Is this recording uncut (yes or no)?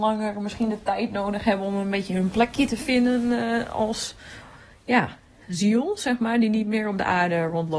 yes